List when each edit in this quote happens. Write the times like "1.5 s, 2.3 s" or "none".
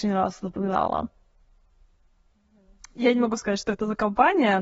3.0 s